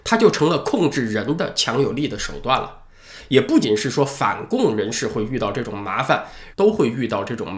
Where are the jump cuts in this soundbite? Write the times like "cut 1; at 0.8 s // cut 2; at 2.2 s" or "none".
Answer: cut 1; at 3.6 s // cut 2; at 6.5 s